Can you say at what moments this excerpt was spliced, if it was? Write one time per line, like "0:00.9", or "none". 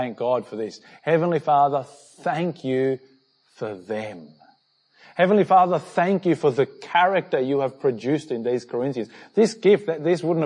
none